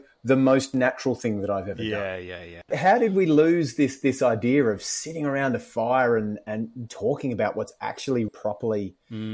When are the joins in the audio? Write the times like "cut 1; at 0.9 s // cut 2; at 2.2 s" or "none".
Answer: cut 1; at 2.7 s // cut 2; at 6.9 s // cut 3; at 8.3 s